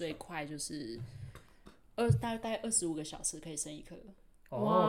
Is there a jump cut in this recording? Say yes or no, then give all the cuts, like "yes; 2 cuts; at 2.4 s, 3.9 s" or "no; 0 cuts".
no; 0 cuts